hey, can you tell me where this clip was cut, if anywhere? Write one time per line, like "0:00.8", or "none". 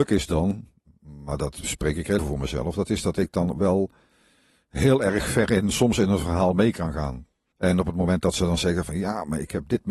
0:02.2
0:07.5